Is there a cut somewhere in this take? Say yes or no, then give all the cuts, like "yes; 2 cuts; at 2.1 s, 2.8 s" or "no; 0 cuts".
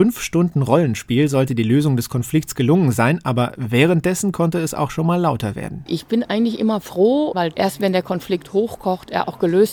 yes; 1 cut; at 7.3 s